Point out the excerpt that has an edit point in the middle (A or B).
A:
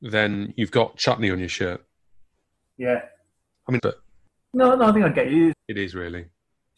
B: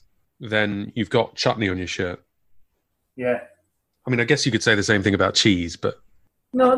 A